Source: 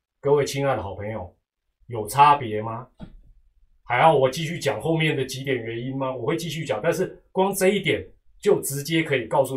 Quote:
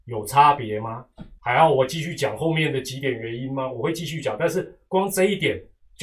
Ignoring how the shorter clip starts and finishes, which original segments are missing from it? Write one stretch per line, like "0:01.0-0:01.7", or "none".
0:03.2-0:03.8